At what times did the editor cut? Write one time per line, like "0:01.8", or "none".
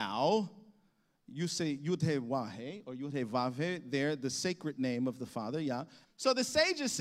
0:06.0